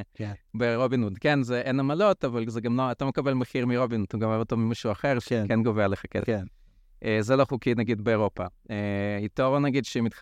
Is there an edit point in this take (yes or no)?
no